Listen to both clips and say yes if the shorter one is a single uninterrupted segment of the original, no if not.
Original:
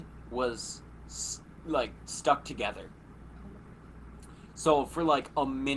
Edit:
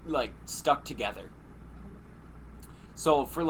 yes